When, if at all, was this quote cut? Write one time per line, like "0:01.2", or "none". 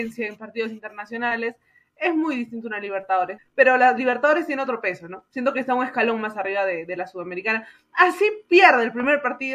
0:03.4